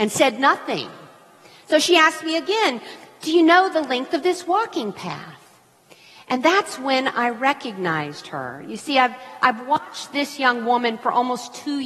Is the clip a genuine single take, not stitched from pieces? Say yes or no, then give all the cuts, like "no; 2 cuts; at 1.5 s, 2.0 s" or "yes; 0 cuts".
yes; 0 cuts